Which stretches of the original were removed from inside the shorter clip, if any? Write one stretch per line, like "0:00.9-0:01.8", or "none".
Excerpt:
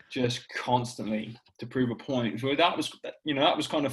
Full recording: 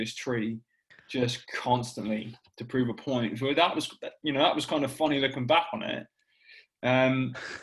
none